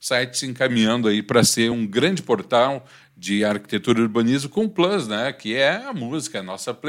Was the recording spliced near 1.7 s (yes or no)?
no